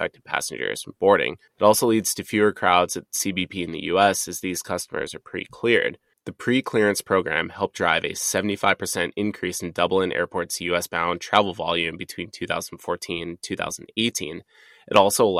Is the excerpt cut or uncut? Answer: cut